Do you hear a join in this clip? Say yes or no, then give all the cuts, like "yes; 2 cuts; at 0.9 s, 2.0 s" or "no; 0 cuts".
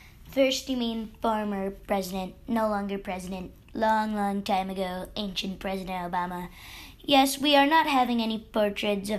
no; 0 cuts